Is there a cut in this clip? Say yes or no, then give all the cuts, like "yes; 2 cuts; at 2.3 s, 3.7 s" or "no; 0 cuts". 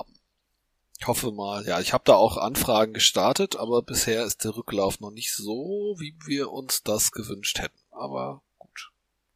no; 0 cuts